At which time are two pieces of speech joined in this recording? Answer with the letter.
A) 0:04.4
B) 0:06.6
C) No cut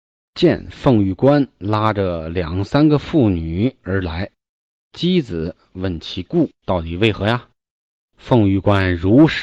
B